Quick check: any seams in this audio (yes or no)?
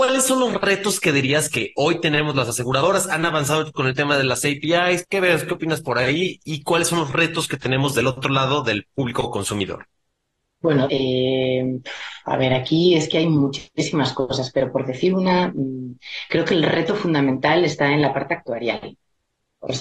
yes